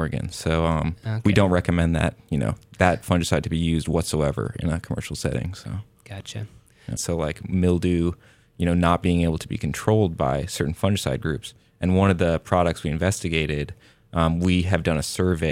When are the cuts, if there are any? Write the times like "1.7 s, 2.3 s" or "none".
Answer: 7.0 s